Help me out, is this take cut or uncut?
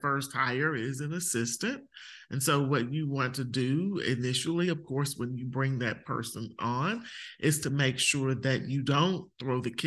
uncut